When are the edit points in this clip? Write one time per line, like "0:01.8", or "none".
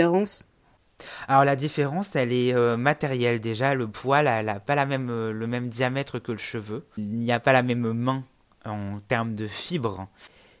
none